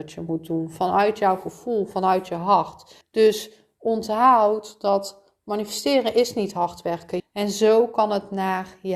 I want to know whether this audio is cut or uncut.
cut